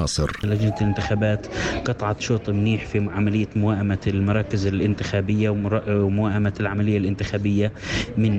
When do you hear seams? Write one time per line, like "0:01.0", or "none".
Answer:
none